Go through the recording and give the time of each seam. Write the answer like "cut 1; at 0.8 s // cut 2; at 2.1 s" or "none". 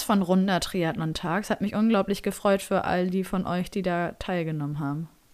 none